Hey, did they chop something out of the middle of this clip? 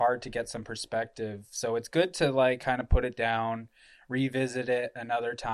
no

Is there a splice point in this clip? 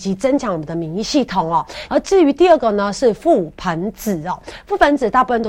yes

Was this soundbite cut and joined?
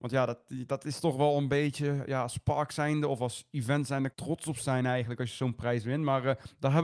yes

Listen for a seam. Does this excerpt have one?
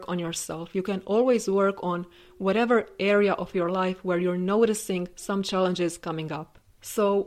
no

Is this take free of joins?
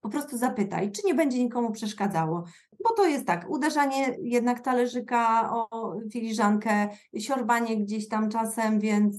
yes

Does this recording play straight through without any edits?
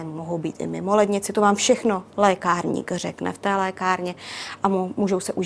yes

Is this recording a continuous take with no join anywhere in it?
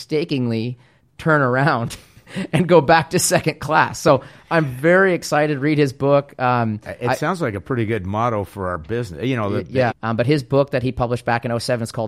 no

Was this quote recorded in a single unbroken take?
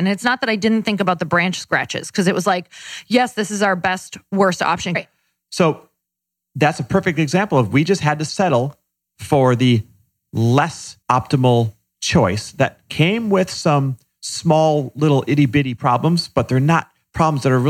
no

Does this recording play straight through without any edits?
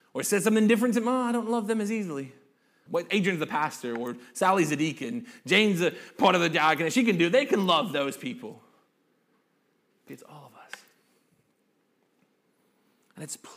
no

